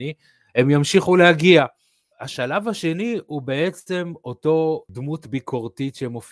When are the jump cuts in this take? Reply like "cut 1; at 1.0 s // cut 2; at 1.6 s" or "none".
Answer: cut 1; at 2.1 s